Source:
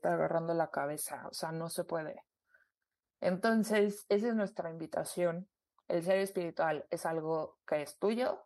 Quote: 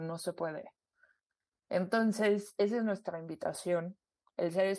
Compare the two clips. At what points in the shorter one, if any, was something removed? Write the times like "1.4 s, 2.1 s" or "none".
none